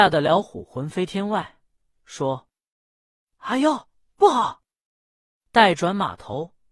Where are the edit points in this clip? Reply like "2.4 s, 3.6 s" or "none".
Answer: none